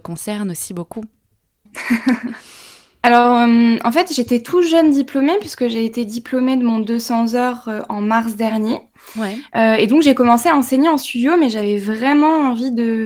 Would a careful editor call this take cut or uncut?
cut